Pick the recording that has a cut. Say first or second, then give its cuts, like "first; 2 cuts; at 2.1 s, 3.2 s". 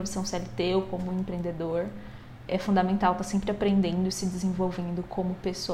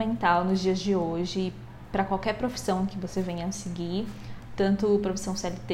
first; 1 cut; at 2.5 s